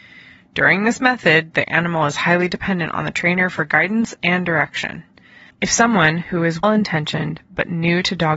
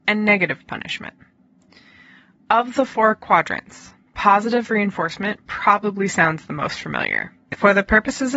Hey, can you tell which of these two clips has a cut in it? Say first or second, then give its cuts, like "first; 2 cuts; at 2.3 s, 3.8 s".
first; 2 cuts; at 5.5 s, 6.6 s